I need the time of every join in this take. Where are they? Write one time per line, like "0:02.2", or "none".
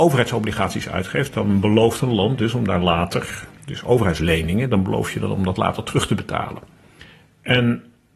none

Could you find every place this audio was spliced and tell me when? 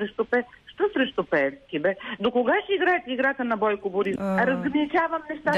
0:04.2

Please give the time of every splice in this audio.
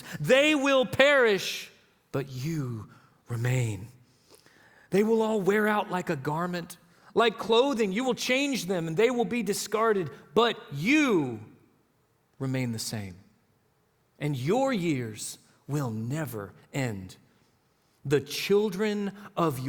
none

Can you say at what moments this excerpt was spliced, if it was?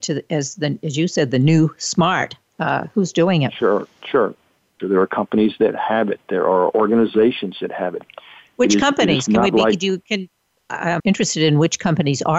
0:04.8
0:11.0

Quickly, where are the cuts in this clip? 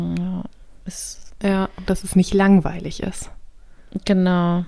0:01.9

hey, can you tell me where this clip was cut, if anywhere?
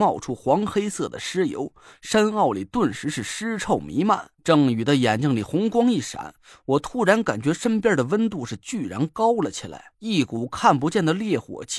0:04.4
0:09.9

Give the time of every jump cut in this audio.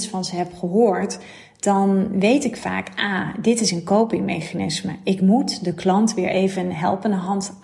none

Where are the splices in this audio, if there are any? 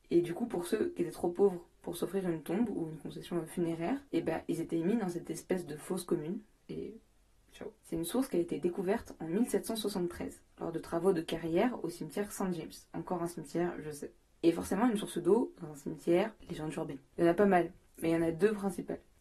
0:07.8

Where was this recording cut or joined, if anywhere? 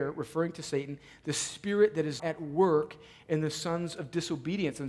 0:02.2

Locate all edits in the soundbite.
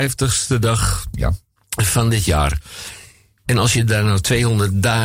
none

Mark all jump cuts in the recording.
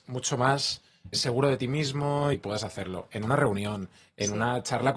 0:01.1
0:02.3

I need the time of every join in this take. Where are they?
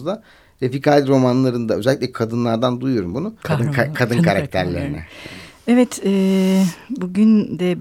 0:03.4

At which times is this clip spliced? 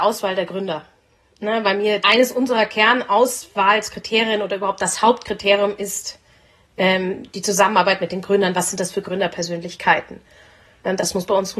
0:02.0

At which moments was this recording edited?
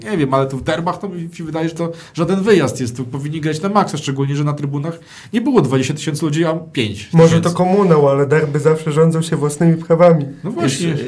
none

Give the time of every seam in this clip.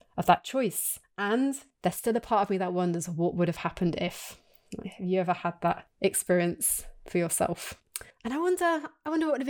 none

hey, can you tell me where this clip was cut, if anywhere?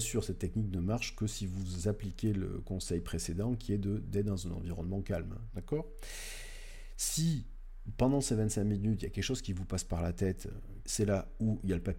0:05.5
0:10.8

